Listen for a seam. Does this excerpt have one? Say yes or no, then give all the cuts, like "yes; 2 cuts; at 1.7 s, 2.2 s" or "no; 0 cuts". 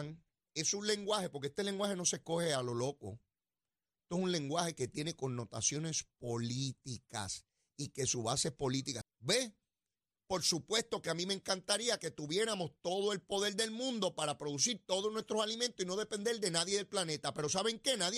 yes; 1 cut; at 9.0 s